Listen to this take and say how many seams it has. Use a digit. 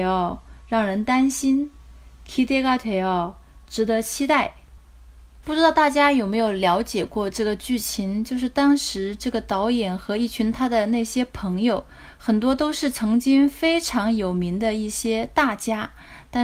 0